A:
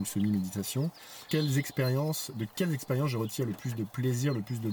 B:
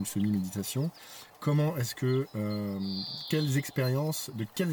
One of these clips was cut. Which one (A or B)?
A